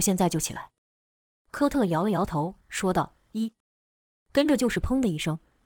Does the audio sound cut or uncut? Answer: uncut